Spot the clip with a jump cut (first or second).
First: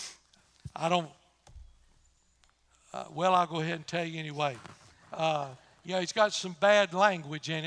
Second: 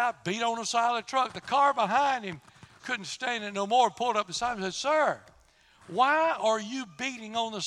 second